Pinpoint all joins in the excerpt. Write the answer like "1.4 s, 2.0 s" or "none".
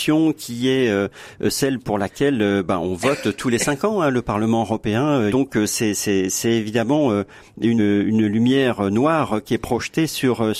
5.3 s, 7.8 s